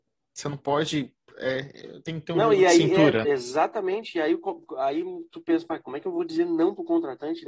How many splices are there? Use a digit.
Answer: 1